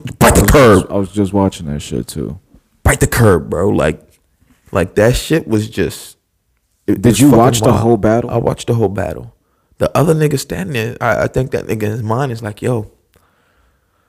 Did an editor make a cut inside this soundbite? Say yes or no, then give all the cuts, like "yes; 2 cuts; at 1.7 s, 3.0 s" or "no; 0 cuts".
no; 0 cuts